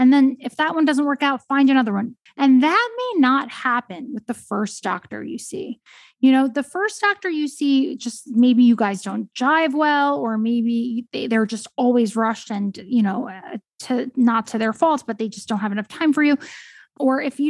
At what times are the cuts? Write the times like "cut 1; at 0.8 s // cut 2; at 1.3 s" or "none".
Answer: cut 1; at 2.3 s